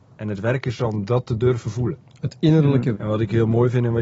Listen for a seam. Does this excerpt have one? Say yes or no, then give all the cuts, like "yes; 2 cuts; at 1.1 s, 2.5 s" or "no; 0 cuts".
yes; 1 cut; at 2.9 s